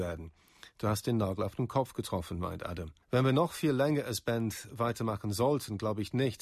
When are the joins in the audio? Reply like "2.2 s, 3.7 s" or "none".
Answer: 3.0 s